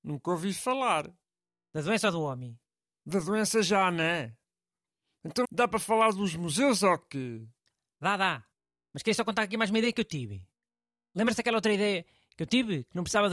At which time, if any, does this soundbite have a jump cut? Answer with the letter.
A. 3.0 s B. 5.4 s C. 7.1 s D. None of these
B